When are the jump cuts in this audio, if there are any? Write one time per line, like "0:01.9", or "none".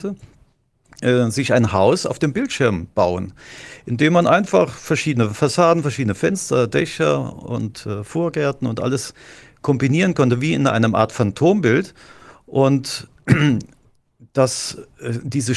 none